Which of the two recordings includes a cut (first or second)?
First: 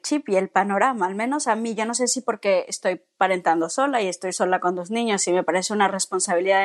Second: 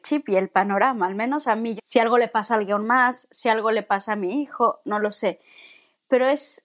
second